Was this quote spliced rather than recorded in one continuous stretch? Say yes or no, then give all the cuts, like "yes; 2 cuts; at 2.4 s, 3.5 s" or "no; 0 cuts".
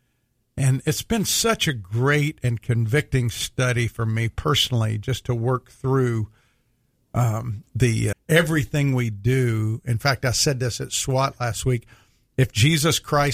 yes; 1 cut; at 8.1 s